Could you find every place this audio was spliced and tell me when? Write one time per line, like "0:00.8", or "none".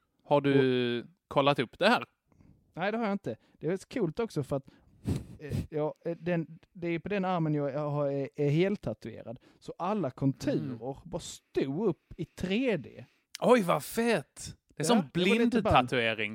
none